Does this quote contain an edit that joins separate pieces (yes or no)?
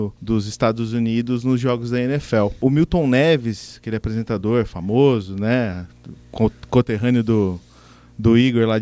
no